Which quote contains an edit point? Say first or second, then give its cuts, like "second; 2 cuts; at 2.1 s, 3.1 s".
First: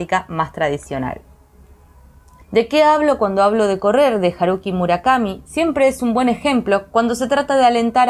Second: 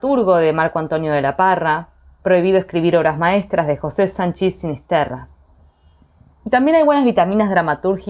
first; 1 cut; at 2.4 s